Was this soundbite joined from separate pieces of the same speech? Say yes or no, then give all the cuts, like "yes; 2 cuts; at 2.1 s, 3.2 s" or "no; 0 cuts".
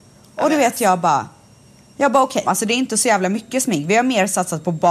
yes; 1 cut; at 2.4 s